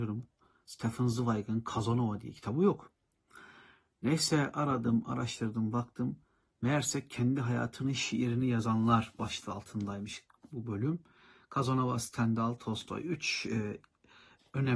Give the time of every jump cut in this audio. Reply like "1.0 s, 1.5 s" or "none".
none